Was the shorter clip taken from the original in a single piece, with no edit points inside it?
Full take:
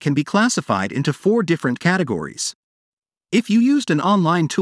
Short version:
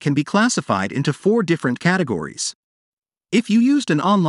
yes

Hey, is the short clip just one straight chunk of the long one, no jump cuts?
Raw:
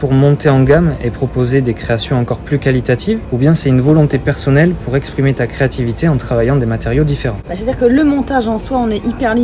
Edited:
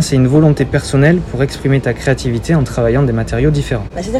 yes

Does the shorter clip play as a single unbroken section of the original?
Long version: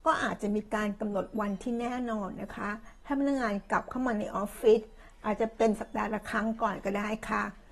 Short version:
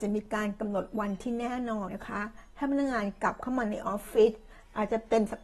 no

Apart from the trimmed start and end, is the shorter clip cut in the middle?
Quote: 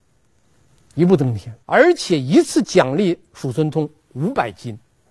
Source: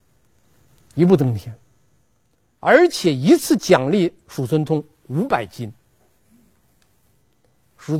yes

